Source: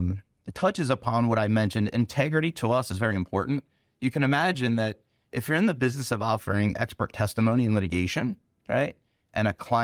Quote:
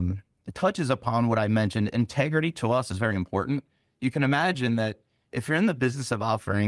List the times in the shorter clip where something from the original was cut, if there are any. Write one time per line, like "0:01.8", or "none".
none